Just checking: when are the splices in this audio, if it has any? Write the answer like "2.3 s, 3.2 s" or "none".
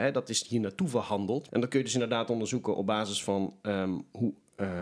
1.5 s